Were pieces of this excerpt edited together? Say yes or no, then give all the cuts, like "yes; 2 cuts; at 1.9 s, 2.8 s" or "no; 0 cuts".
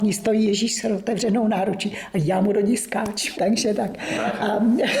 yes; 1 cut; at 3.3 s